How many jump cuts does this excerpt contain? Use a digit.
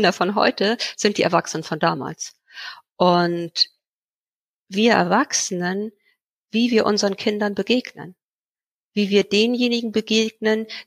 1